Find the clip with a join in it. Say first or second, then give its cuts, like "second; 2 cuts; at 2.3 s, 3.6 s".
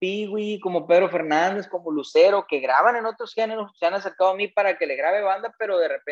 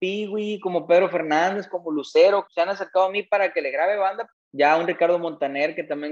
second; 2 cuts; at 2.5 s, 4.3 s